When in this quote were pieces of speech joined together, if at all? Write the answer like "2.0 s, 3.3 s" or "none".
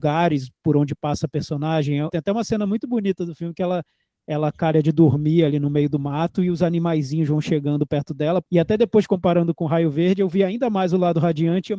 2.1 s, 8.4 s